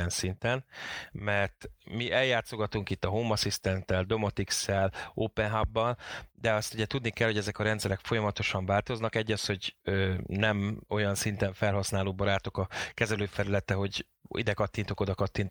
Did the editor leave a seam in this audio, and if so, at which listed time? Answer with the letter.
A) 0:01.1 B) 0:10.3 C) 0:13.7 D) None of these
D